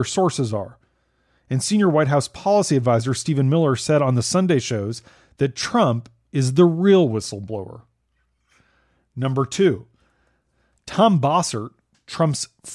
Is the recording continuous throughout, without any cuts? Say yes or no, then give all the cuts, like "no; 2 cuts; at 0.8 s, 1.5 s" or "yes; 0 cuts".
yes; 0 cuts